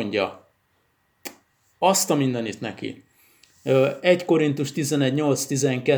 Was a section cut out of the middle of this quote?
no; 0 cuts

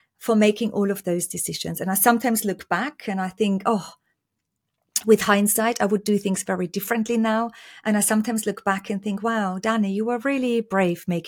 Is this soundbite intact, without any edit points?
yes; 0 cuts

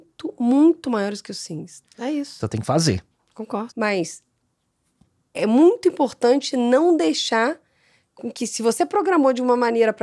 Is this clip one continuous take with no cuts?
no; 2 cuts; at 1.8 s, 3.7 s

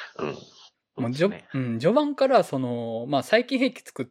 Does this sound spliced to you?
no; 0 cuts

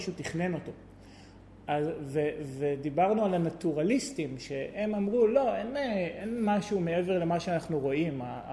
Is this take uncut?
yes; 0 cuts

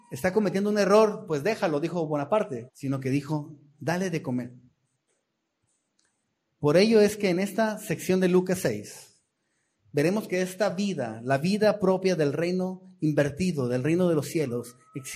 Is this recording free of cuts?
no; 1 cut; at 2.7 s

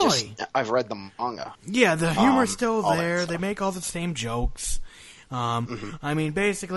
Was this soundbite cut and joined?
yes; 1 cut; at 1.5 s

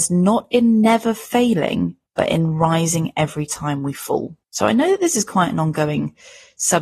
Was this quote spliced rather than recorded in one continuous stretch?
yes; 2 cuts; at 2.1 s, 4.4 s

